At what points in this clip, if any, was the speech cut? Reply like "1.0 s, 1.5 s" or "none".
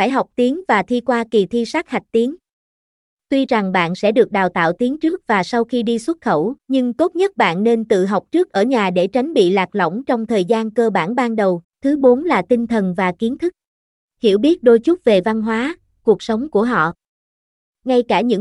6.6 s, 11.6 s, 14.0 s